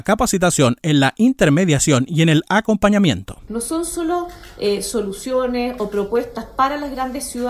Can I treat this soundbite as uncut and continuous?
no; 1 cut; at 3.5 s

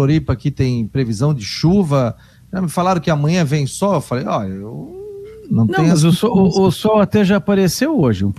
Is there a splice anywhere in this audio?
no; 0 cuts

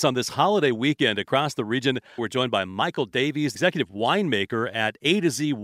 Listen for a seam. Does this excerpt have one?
yes; 1 cut; at 2.2 s

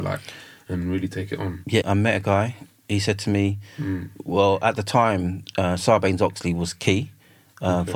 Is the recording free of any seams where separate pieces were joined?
no; 1 cut; at 1.8 s

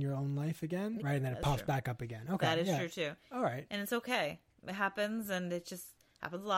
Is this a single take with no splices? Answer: no; 1 cut; at 1.0 s

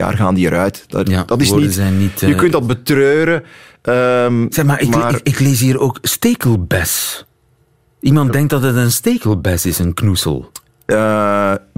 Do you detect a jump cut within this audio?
no; 0 cuts

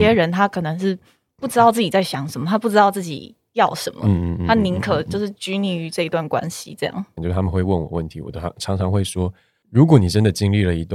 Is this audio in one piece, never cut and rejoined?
no; 1 cut; at 7.2 s

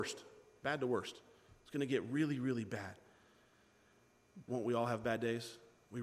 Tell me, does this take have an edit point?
yes; 1 cut; at 4.5 s

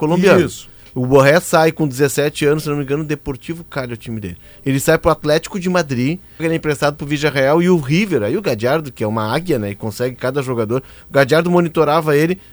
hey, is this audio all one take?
no; 1 cut; at 6.4 s

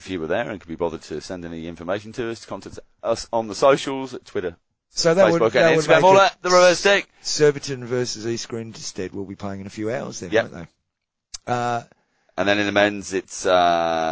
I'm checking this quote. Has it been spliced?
no; 0 cuts

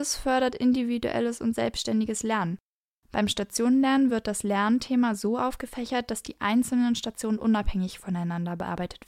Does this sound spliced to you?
no; 0 cuts

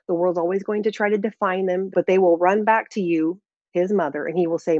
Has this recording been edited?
yes; 1 cut; at 1.9 s

